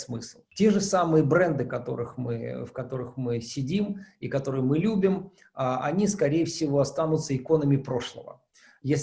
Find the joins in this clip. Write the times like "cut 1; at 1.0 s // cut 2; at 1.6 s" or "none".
none